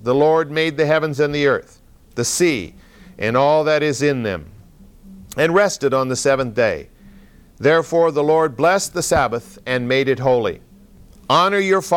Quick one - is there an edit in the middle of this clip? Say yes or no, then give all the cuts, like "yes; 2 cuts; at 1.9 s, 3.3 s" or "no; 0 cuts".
no; 0 cuts